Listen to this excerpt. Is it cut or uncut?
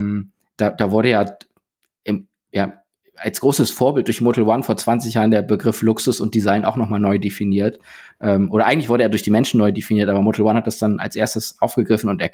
uncut